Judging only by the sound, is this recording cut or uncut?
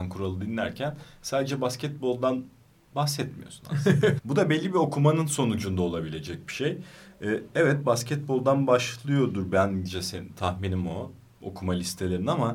cut